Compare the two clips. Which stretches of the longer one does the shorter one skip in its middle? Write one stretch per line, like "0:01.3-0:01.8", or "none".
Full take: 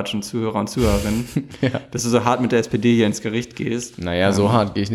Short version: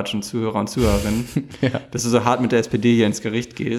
none